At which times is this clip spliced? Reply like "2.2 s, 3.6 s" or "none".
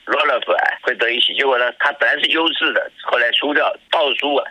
none